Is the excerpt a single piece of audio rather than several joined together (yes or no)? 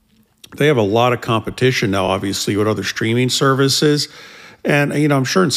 yes